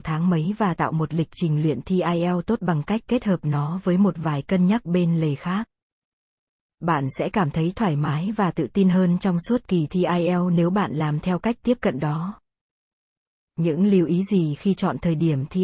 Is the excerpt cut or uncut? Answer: uncut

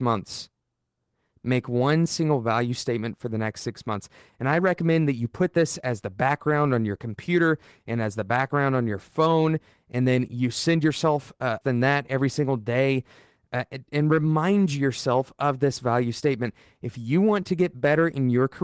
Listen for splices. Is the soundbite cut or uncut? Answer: cut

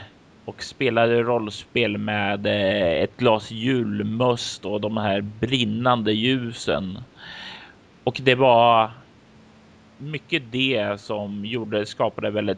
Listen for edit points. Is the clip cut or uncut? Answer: uncut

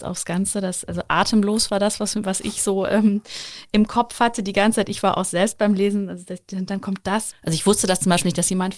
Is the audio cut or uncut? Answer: cut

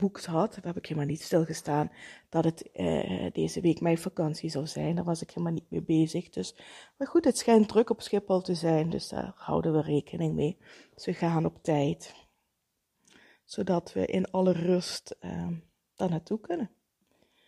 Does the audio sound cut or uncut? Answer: uncut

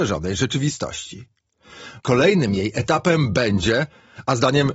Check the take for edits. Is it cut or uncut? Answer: cut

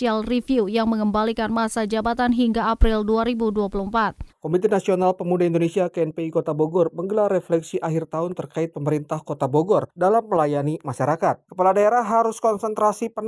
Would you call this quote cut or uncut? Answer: cut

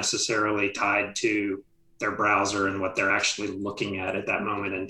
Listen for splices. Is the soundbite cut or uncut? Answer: uncut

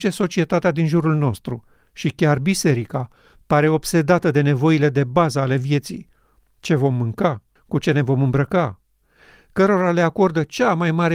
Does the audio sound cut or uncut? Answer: cut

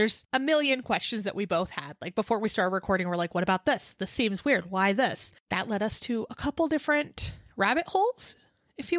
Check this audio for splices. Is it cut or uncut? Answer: uncut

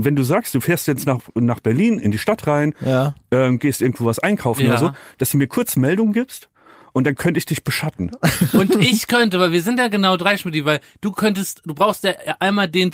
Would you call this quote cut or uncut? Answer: uncut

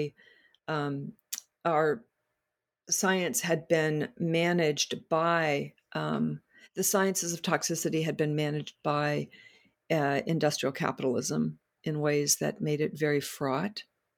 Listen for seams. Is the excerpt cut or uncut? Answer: uncut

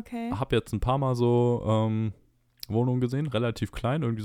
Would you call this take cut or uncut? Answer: cut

